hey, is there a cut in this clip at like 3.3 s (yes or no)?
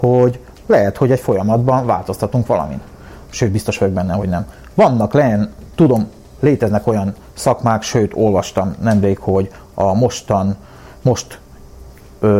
yes